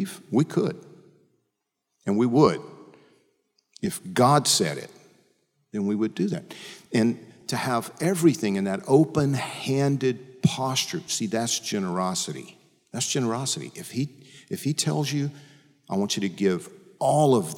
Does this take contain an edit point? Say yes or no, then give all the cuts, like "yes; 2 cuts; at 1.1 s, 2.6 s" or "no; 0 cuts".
no; 0 cuts